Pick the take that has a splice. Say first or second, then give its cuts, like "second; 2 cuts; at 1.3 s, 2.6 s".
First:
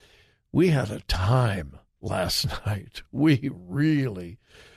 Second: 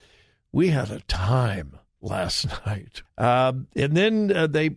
second; 1 cut; at 3.1 s